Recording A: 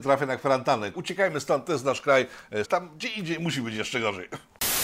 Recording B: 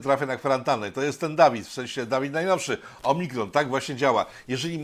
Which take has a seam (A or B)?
A